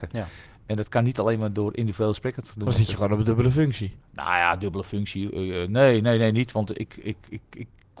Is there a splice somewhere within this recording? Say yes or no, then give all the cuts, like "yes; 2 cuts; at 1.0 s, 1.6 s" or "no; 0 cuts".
yes; 1 cut; at 4.0 s